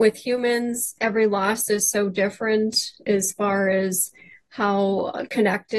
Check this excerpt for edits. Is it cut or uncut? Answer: uncut